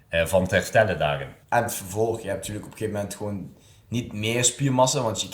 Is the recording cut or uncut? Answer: cut